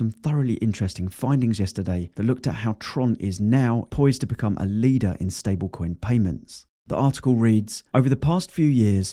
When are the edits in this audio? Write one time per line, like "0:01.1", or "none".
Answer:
0:03.9